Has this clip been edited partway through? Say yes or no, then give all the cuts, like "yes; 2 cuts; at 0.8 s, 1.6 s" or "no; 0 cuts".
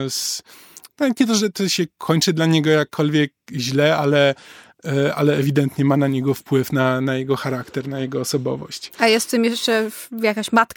no; 0 cuts